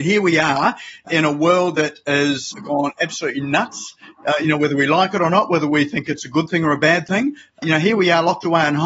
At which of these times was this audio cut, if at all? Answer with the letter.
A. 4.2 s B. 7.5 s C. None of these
C